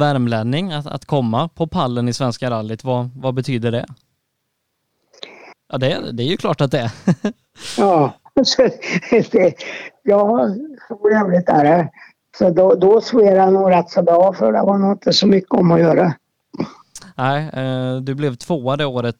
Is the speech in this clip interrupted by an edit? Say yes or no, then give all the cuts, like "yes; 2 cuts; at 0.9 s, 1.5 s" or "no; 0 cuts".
yes; 1 cut; at 5.5 s